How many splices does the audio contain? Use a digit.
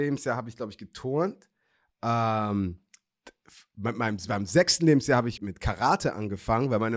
1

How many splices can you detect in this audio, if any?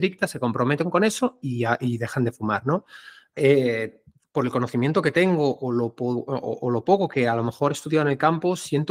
1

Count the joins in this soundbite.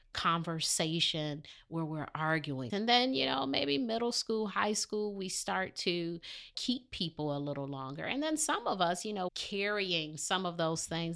2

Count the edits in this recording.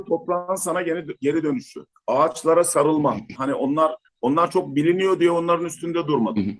1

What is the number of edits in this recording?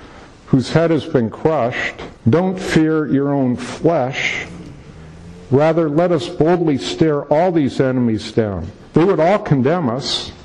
1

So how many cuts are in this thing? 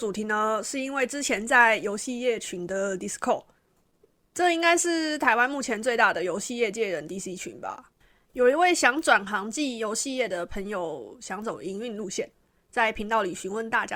0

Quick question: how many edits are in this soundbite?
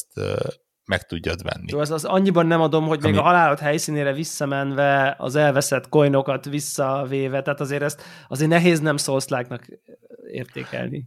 0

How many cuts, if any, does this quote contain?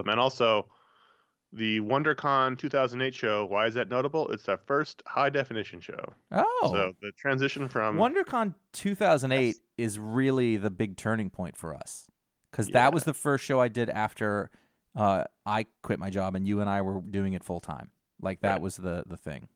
0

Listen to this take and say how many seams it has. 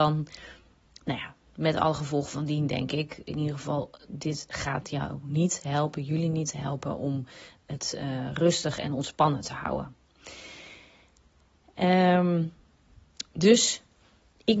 0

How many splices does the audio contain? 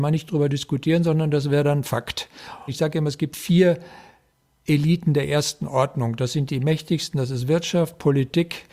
1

